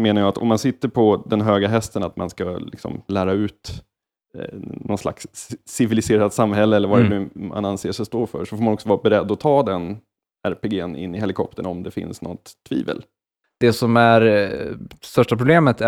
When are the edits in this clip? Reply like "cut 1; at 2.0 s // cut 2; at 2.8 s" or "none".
cut 1; at 13.4 s

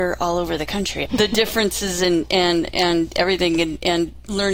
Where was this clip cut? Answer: cut 1; at 1.1 s

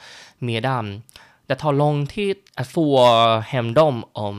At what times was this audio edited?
cut 1; at 2.5 s

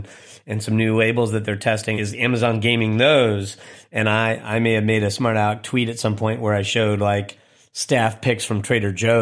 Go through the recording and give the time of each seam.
cut 1; at 1.9 s

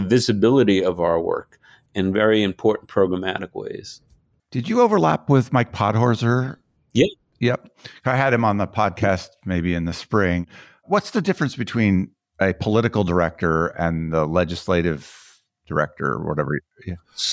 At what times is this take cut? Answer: none

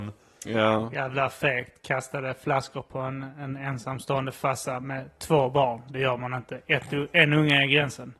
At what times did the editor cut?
none

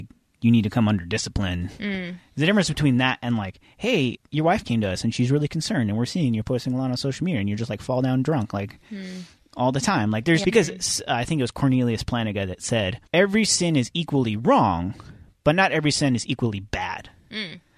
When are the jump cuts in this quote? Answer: cut 1; at 4.2 s // cut 2; at 10.4 s // cut 3; at 13.1 s

